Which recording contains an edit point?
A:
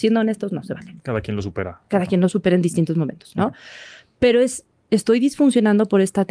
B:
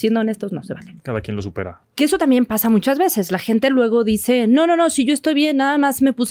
B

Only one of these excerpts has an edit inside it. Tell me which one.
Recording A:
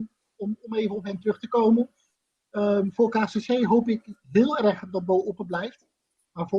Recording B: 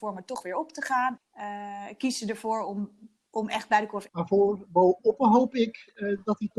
B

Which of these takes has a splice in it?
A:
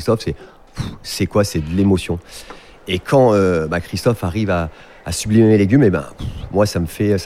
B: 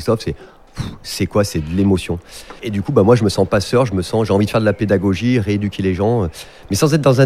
B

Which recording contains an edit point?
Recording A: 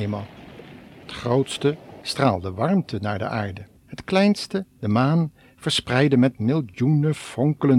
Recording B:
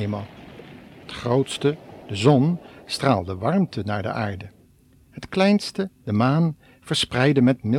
A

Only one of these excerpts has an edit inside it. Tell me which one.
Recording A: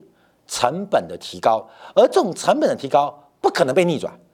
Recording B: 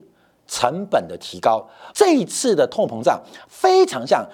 B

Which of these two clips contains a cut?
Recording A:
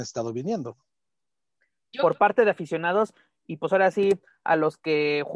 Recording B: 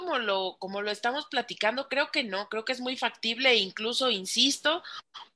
A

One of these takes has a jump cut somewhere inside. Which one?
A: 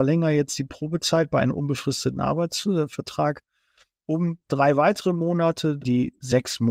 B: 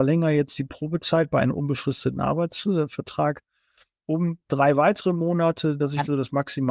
A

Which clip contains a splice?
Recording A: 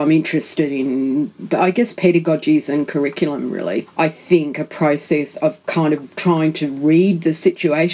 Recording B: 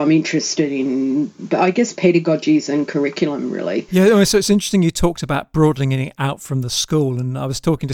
A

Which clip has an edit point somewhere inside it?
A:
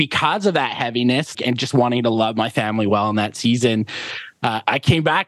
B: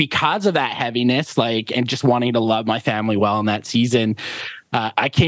A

